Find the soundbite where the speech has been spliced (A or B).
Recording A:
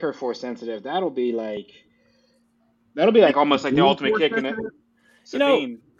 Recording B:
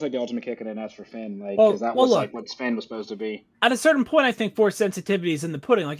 B